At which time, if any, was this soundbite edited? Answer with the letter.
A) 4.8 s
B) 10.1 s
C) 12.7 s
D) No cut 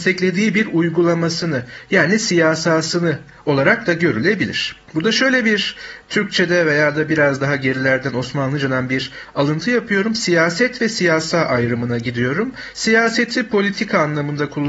A